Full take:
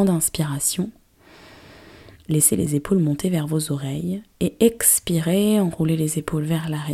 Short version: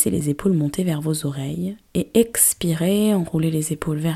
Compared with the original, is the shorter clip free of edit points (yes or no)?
yes